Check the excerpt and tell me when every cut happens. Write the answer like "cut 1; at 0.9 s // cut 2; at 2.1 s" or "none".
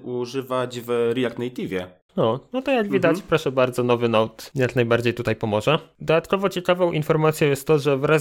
cut 1; at 2.1 s